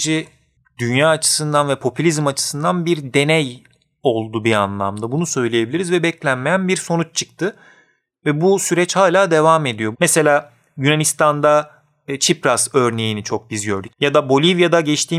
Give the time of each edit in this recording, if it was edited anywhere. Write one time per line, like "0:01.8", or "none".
0:09.9
0:13.9